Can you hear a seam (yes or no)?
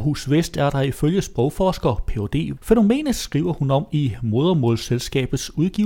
yes